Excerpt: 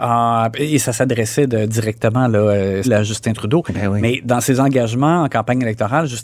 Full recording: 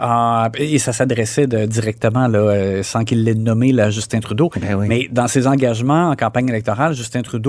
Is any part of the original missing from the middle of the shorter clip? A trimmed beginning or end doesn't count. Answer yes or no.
yes